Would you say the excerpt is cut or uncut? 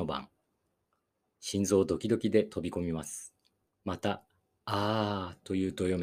cut